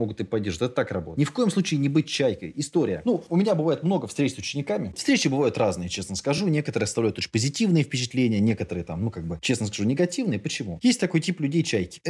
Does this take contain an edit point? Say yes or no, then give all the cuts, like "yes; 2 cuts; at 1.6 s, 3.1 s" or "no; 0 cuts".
no; 0 cuts